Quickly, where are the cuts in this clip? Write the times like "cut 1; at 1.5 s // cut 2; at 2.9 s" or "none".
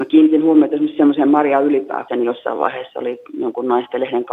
cut 1; at 2.1 s

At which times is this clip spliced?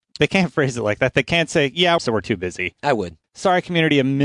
cut 1; at 2.0 s // cut 2; at 3.2 s

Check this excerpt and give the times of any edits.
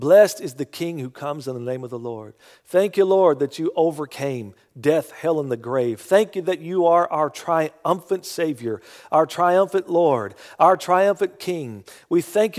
none

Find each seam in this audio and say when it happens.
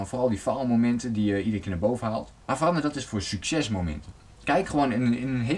cut 1; at 2.4 s

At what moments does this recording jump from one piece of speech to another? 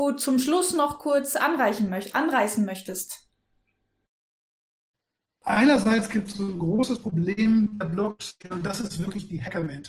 none

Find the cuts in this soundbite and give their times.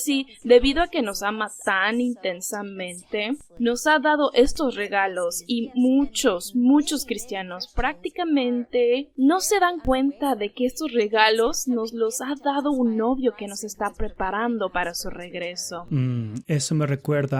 none

